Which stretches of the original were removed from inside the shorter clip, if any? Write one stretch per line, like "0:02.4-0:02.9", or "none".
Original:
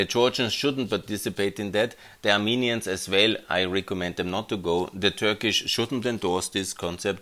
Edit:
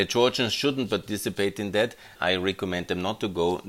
0:02.2-0:03.4